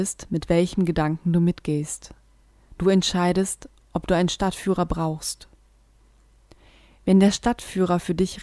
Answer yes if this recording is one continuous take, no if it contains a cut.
yes